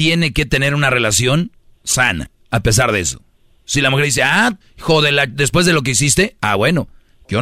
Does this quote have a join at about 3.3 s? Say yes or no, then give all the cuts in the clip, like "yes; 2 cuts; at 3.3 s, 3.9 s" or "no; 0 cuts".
no; 1 cut; at 4.6 s